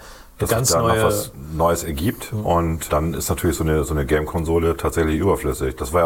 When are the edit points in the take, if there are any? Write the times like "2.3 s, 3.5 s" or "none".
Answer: 2.9 s